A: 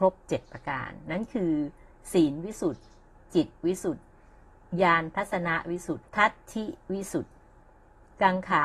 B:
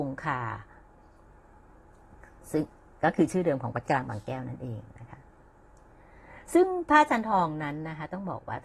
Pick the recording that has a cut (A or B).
A